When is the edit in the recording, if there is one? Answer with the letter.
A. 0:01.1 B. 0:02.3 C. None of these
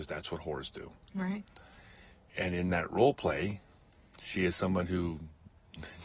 B